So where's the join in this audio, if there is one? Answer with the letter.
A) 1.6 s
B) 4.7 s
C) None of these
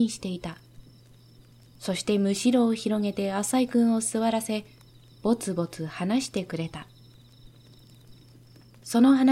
A